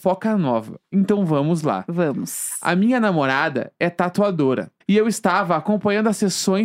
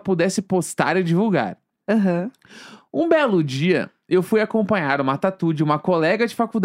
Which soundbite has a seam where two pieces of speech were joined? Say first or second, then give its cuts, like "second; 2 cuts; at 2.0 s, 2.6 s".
first; 1 cut; at 4.8 s